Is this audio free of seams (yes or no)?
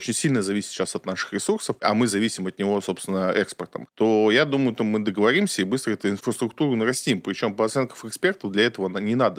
yes